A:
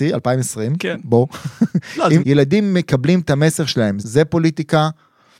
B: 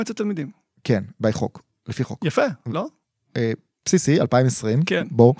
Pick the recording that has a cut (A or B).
A